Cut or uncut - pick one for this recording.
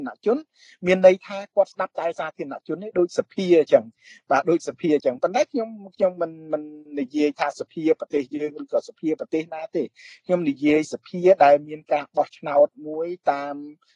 uncut